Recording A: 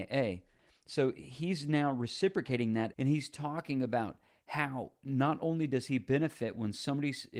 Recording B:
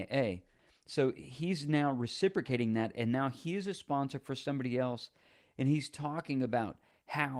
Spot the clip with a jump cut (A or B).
A